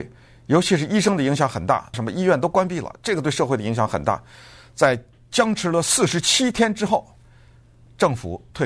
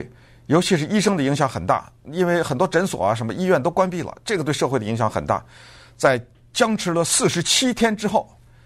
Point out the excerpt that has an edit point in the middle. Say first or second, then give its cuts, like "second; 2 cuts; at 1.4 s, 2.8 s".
first; 1 cut; at 1.9 s